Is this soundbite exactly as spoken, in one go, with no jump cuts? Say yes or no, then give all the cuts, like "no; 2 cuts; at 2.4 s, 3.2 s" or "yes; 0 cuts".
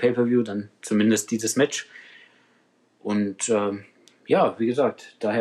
yes; 0 cuts